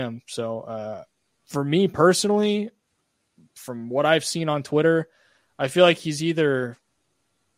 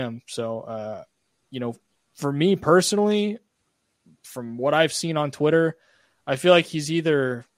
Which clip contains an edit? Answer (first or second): first